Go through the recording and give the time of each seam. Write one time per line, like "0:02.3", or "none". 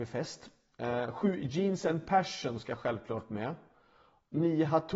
none